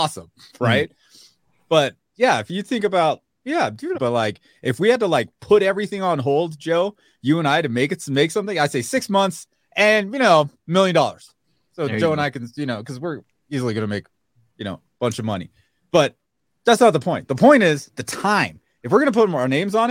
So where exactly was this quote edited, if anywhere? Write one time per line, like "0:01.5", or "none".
0:03.9